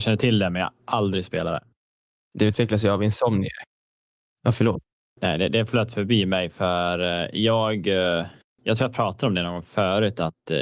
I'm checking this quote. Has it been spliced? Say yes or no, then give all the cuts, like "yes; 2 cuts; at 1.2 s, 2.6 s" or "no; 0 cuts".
no; 0 cuts